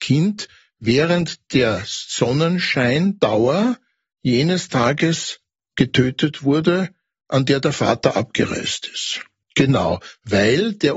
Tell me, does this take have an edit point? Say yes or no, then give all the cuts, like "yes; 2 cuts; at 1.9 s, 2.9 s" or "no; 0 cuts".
yes; 1 cut; at 9.4 s